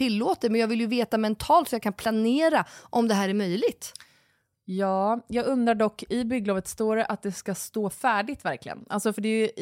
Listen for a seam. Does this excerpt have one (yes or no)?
no